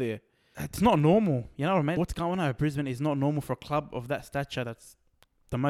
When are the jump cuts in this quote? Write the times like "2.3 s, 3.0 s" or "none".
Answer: 2.0 s